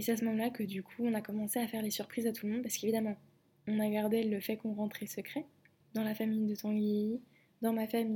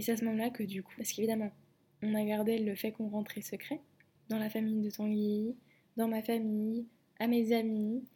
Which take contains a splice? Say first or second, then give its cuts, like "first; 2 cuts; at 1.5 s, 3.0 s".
second; 1 cut; at 1.0 s